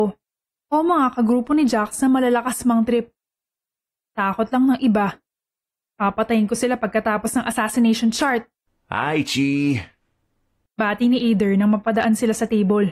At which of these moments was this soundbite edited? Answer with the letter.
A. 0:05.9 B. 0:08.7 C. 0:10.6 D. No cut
D